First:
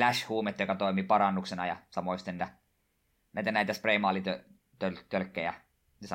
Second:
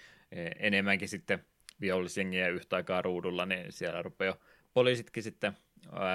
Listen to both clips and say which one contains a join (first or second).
first